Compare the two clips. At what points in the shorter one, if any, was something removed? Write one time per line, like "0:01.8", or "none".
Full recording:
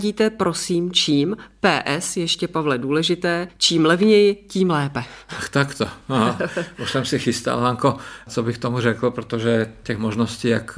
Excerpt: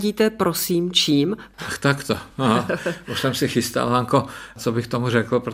0:01.5